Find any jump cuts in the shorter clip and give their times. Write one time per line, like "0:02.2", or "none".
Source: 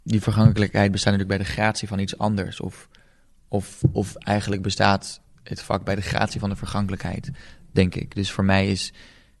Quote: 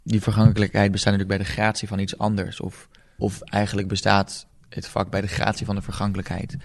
0:03.2